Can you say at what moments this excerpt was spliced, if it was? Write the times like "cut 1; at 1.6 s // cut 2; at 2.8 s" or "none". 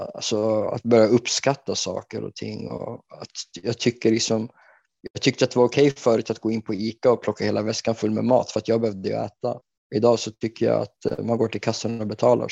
none